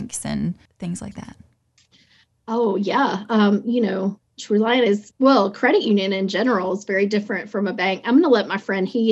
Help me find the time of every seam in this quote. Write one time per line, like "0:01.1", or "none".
0:05.1